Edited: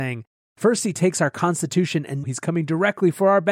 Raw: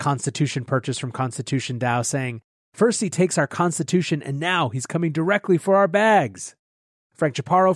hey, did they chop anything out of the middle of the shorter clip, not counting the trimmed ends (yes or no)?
yes